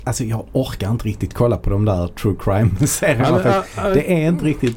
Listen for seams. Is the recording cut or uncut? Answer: uncut